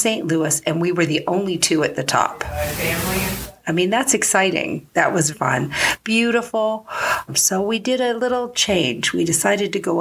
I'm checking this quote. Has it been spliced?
yes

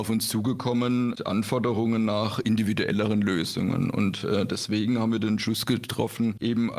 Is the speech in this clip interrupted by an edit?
no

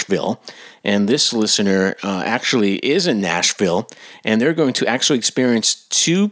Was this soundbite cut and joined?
no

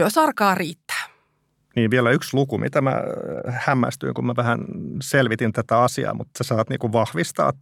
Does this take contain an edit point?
no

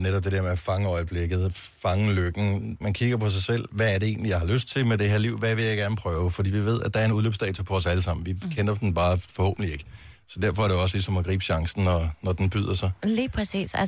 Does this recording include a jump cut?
yes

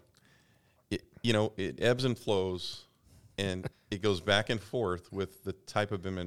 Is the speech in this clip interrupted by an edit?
yes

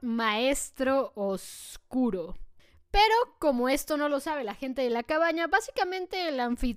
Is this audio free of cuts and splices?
yes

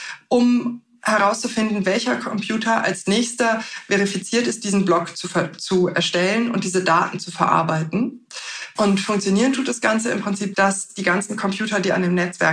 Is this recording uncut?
no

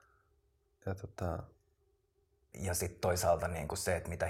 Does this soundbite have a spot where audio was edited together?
yes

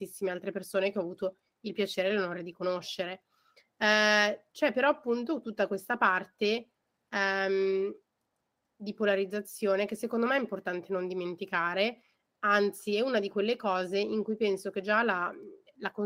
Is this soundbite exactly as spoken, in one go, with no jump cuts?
yes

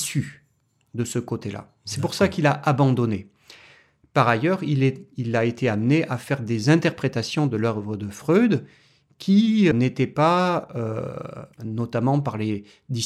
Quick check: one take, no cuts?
no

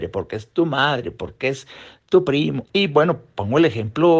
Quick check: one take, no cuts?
no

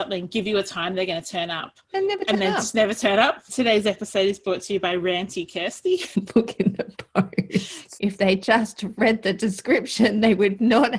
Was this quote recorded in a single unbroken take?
no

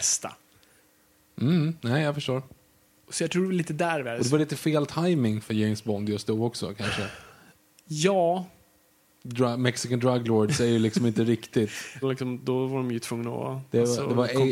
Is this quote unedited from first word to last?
no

